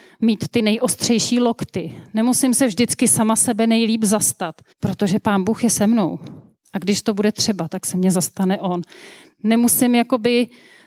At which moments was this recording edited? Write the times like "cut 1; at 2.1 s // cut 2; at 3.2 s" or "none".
cut 1; at 4.7 s